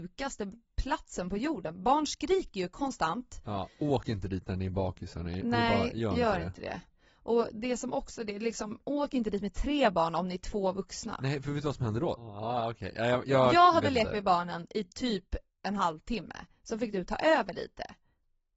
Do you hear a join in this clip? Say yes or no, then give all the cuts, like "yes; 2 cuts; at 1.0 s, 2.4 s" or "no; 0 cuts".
yes; 1 cut; at 12.2 s